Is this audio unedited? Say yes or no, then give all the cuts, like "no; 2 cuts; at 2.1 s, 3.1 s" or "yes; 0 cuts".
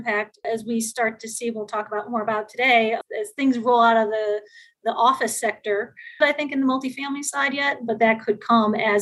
no; 1 cut; at 6.2 s